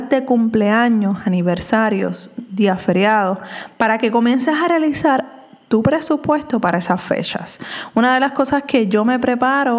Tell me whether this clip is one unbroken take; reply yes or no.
yes